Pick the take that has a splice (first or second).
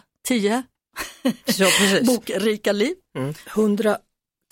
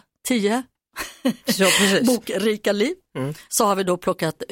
first